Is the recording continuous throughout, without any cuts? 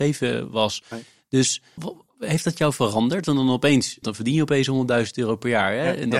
no; 2 cuts; at 1.8 s, 4.0 s

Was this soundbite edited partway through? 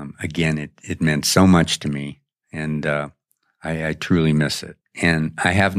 yes; 1 cut; at 4.8 s

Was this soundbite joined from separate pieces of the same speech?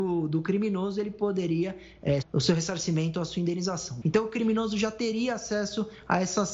yes; 2 cuts; at 2.2 s, 4.0 s

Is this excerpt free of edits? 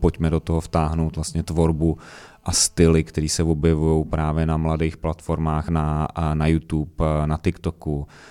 yes; 0 cuts

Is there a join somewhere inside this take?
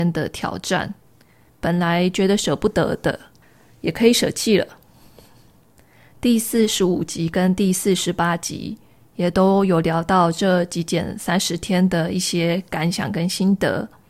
yes; 2 cuts; at 1.5 s, 6.1 s

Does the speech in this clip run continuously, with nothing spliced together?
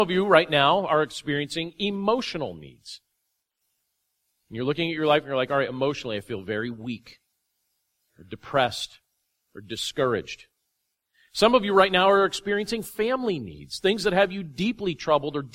yes; 0 cuts

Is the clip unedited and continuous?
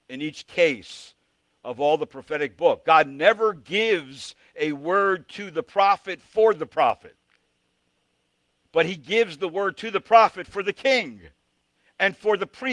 yes; 0 cuts

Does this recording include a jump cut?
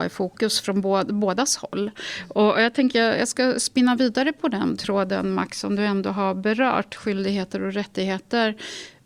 no; 0 cuts

